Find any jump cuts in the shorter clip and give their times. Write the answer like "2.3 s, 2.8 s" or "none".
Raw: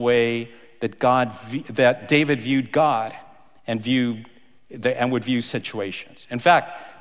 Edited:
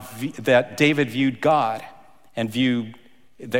none